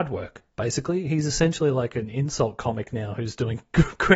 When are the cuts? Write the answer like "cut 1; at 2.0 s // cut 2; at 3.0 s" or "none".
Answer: none